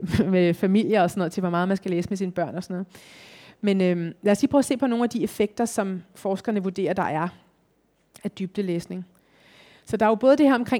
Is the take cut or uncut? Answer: uncut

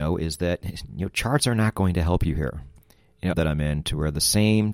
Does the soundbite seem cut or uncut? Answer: cut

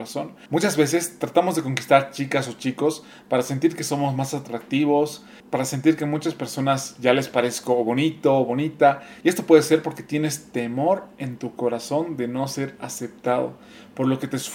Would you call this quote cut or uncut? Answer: uncut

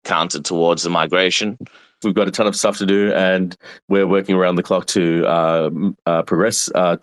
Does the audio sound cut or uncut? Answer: cut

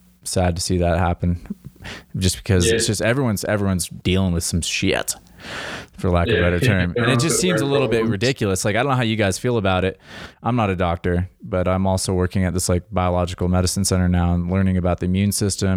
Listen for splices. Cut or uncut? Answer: cut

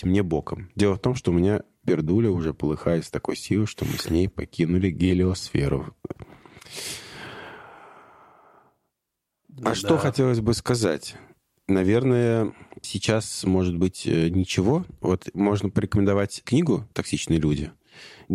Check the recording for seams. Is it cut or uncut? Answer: cut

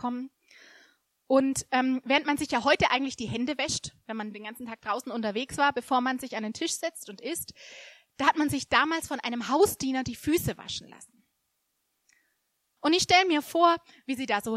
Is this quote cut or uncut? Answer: cut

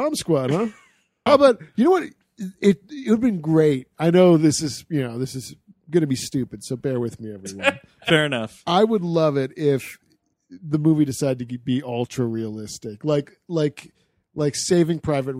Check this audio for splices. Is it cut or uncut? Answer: cut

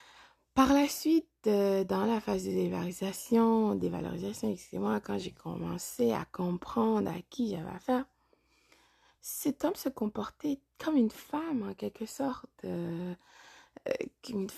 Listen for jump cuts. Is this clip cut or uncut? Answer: uncut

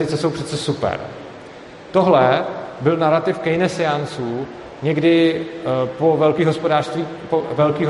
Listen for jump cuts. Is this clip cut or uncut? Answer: uncut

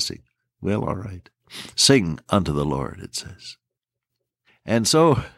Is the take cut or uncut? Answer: cut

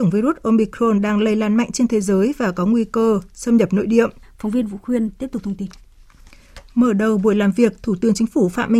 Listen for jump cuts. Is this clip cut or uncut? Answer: cut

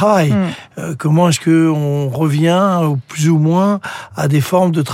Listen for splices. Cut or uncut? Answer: uncut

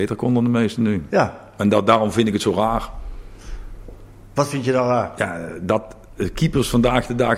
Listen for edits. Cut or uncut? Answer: uncut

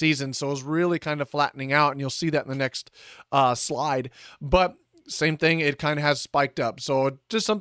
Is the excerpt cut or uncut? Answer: uncut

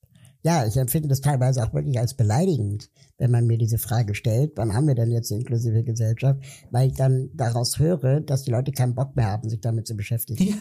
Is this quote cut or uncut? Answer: uncut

